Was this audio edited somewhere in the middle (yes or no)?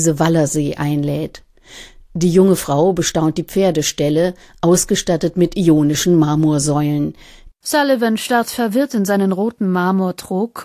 yes